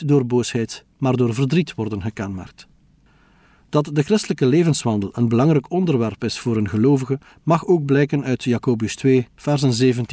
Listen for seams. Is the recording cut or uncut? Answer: uncut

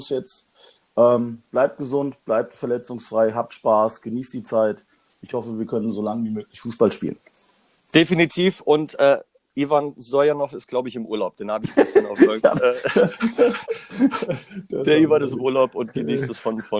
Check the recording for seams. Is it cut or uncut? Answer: uncut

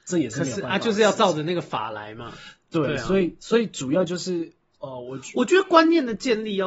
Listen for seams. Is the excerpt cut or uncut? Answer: uncut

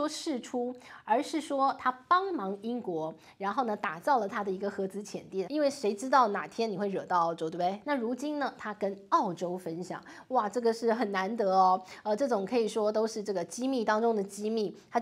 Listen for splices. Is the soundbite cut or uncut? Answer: cut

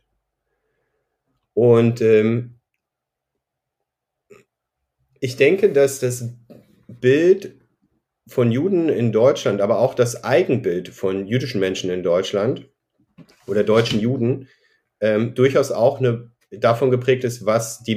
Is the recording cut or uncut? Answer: uncut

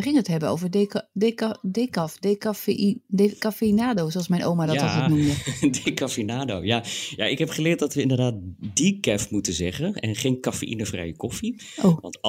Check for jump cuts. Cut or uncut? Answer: uncut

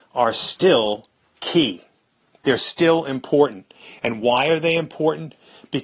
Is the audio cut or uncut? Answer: uncut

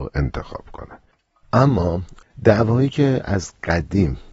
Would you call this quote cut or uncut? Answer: uncut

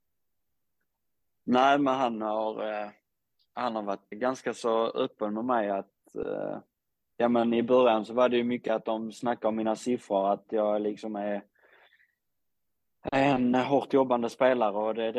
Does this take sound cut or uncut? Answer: cut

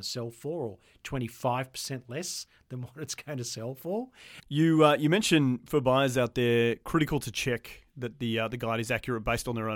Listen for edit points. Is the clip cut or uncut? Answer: cut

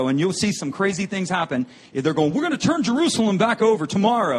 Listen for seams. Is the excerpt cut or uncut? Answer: uncut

